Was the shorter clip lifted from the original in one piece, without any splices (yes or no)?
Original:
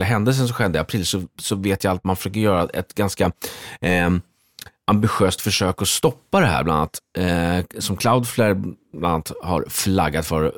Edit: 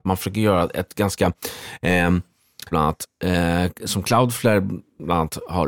no